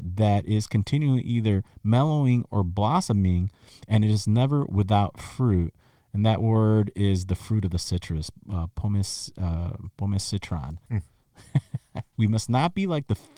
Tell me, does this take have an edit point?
yes; 2 cuts; at 10.9 s, 12.1 s

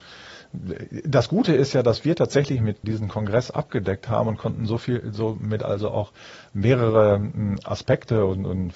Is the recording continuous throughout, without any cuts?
no; 1 cut; at 2.8 s

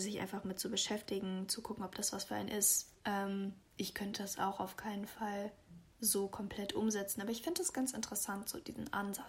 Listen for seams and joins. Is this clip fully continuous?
no; 1 cut; at 3.0 s

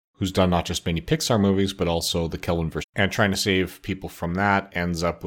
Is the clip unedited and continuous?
no; 1 cut; at 2.8 s

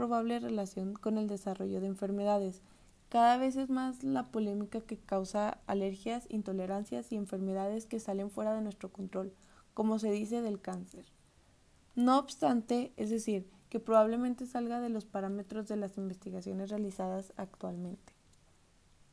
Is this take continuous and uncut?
no; 1 cut; at 12.9 s

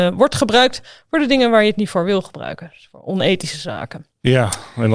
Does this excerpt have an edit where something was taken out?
no; 0 cuts

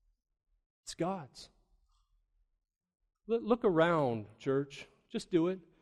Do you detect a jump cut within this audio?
no; 0 cuts

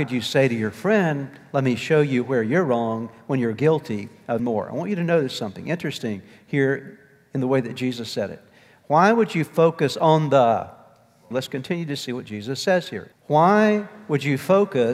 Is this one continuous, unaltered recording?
no; 3 cuts; at 4.4 s, 11.3 s, 13.1 s

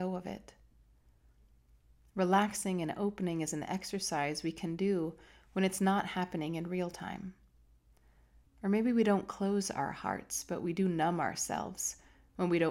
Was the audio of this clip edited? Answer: yes; 1 cut; at 8.5 s

